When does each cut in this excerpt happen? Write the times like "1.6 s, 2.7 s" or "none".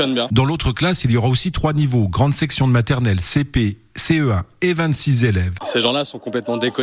5.6 s